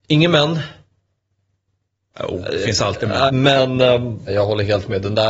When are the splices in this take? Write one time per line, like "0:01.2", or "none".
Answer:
0:03.3
0:04.3